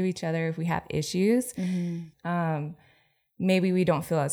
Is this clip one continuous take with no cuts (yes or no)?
no